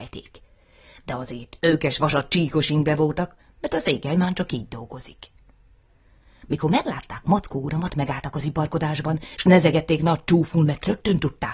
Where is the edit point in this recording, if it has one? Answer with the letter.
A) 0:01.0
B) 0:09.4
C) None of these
C